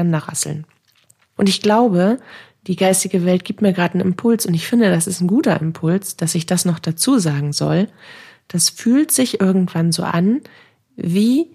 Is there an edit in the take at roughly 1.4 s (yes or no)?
yes